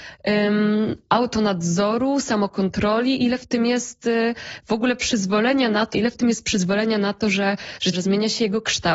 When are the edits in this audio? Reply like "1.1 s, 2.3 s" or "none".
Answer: 5.9 s, 7.9 s